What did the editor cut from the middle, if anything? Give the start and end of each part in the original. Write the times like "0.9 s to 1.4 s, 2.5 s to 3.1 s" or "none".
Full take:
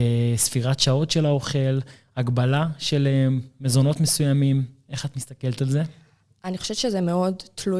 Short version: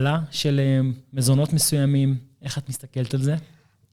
none